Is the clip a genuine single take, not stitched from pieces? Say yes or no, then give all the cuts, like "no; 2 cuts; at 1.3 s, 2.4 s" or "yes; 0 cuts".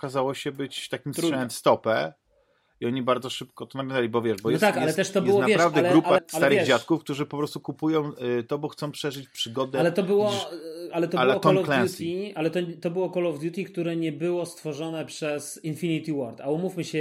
no; 1 cut; at 6.2 s